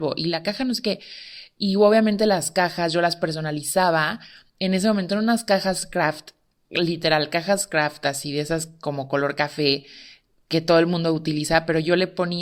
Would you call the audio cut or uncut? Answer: uncut